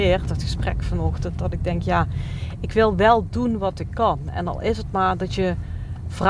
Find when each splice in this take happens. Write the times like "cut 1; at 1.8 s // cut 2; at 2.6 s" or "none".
none

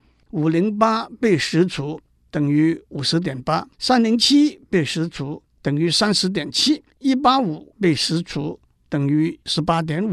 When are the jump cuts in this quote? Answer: cut 1; at 3.7 s // cut 2; at 6.9 s

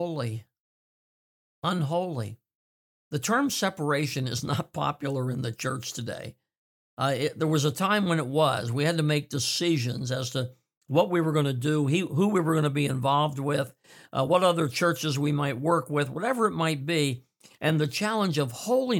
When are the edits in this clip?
none

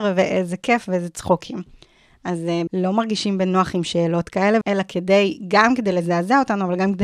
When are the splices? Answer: cut 1; at 2.7 s // cut 2; at 4.6 s

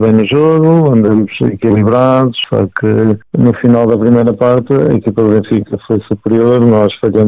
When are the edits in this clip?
none

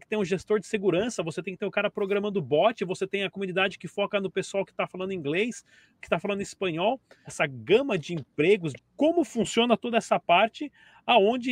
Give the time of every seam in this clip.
cut 1; at 7.3 s // cut 2; at 8.8 s

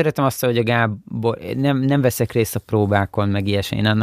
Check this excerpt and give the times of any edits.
none

